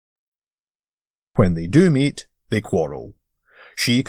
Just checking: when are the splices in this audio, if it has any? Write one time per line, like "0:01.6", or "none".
0:01.3